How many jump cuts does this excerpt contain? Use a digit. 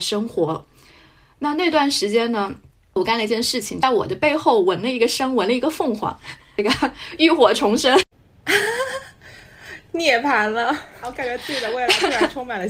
1